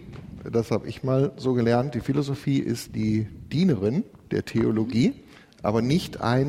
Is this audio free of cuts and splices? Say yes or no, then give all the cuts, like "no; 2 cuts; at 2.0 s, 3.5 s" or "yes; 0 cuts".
yes; 0 cuts